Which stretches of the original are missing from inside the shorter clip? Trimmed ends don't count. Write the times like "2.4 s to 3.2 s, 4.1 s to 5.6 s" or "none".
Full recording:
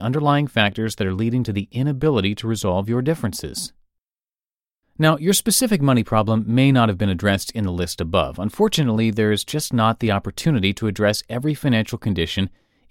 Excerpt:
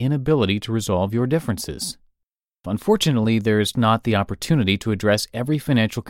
4.4 s to 8.4 s, 9.4 s to 9.7 s